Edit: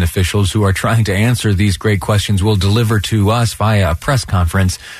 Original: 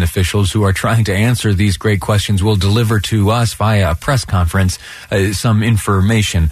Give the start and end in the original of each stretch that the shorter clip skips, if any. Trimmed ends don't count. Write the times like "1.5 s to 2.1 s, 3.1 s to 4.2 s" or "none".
none